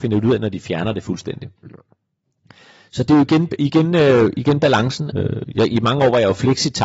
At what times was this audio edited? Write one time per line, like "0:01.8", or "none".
0:05.1